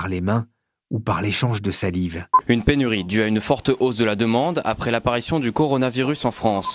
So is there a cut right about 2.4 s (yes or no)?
yes